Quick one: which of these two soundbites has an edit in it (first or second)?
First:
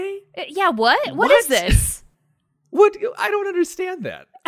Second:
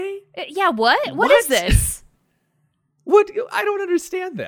first